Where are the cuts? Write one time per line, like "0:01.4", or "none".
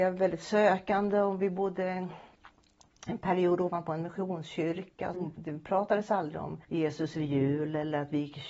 0:05.1
0:06.6